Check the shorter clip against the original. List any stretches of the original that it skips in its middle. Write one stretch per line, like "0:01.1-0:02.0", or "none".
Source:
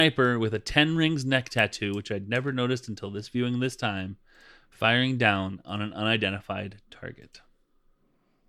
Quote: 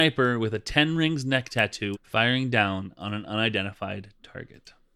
0:01.9-0:04.6